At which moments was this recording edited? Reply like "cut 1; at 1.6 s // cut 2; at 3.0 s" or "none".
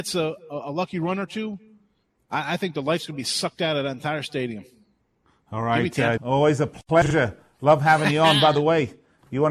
cut 1; at 6.2 s